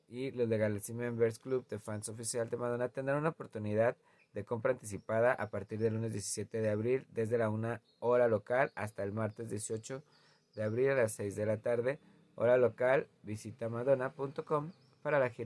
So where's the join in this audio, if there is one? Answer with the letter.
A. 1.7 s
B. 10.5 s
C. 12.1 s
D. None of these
D